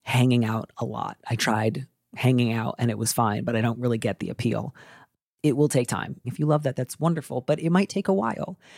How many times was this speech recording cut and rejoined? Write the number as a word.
one